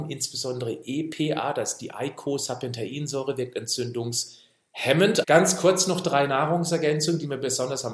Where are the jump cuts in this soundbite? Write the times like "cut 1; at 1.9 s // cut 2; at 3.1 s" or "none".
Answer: cut 1; at 5.2 s